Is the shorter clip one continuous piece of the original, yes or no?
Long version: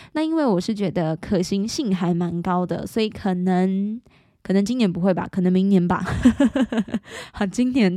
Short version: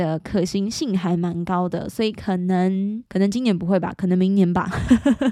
no